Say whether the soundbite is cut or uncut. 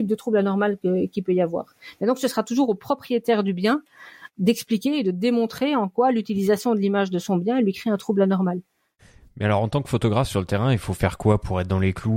uncut